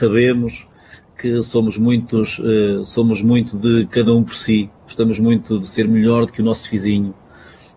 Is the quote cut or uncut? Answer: uncut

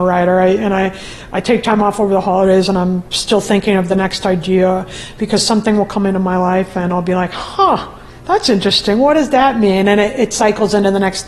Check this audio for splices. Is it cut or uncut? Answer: uncut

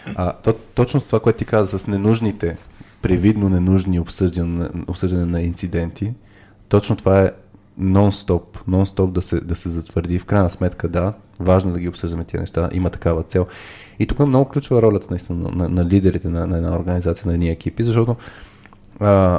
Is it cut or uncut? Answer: uncut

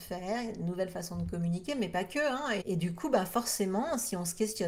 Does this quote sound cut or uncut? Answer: cut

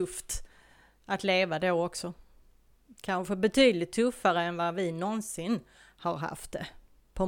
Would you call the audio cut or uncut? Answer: uncut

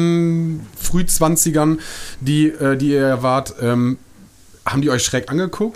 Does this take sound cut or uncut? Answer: uncut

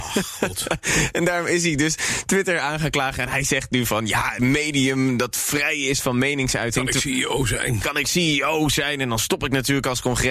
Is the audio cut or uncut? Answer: cut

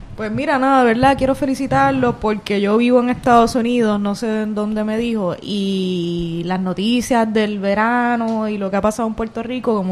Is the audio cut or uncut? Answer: uncut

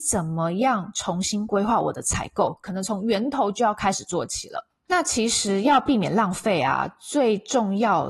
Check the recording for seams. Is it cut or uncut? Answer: uncut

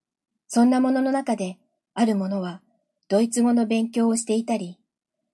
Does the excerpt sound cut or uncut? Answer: uncut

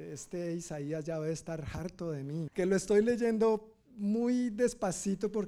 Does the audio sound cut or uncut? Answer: cut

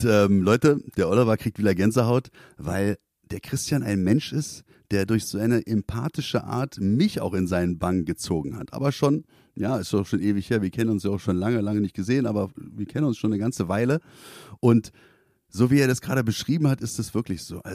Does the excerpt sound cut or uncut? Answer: uncut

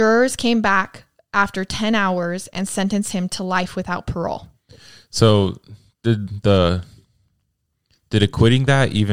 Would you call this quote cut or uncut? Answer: uncut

